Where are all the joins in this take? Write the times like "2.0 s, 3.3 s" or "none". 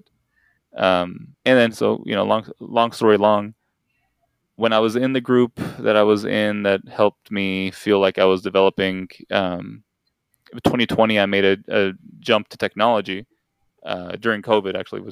1.3 s, 4.5 s

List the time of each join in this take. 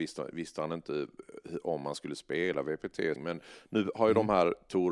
3.2 s

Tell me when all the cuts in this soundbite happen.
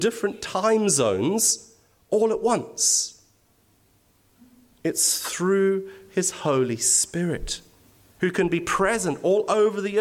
8.2 s

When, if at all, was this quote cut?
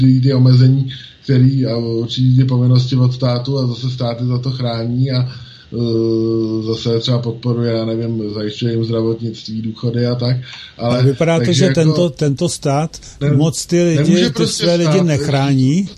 none

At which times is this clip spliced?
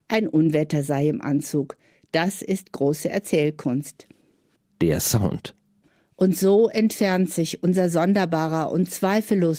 none

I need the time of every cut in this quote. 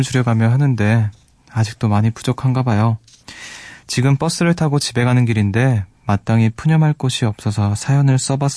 none

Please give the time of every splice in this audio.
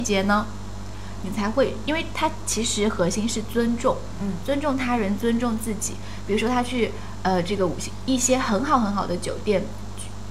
1.2 s

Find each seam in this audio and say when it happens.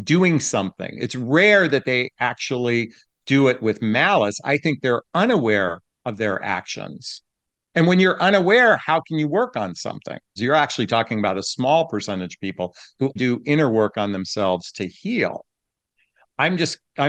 10.4 s, 13.2 s

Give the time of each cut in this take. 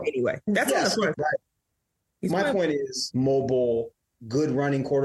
1.1 s, 3.1 s

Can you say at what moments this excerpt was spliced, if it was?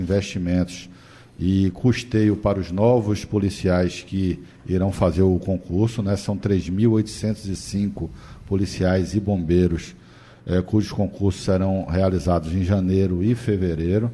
none

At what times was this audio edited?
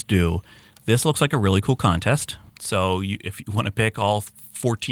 2.5 s

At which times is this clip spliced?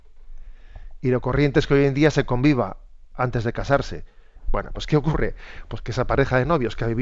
4.4 s

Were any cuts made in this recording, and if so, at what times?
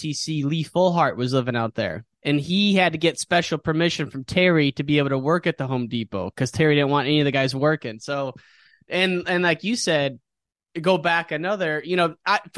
none

